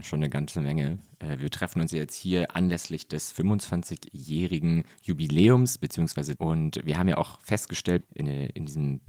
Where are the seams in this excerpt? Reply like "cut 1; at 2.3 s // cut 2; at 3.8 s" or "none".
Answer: cut 1; at 6.4 s // cut 2; at 8.0 s